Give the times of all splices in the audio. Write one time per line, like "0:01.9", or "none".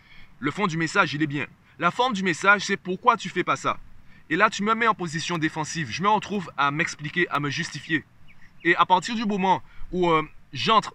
none